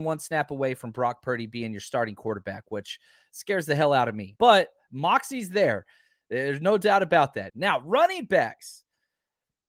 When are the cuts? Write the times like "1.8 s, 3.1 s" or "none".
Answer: 4.4 s, 7.5 s

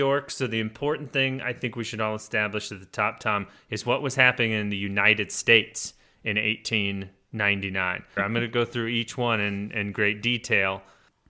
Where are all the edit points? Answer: 8.2 s

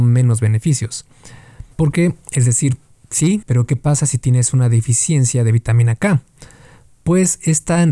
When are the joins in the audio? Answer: 1.7 s, 3.4 s

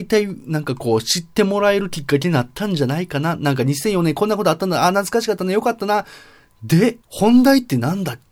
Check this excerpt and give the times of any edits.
7.0 s

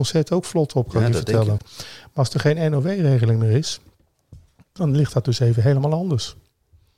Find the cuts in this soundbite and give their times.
1.6 s

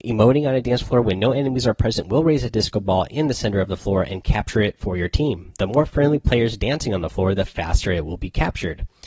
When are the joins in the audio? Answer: none

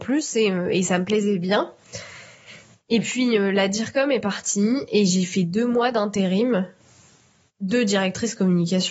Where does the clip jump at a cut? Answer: none

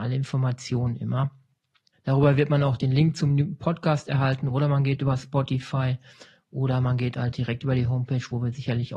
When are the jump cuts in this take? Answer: 1.9 s

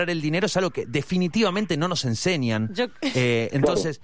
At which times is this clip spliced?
none

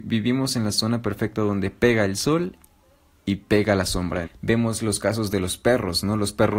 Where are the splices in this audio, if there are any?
4.2 s

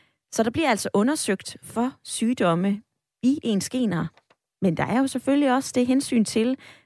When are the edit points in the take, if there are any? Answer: none

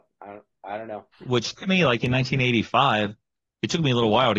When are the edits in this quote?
1.1 s

